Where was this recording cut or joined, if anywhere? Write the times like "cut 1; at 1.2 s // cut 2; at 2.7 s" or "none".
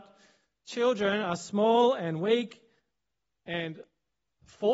none